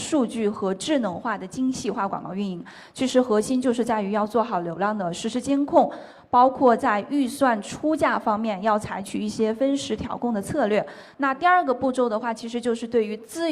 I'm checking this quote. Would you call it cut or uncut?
cut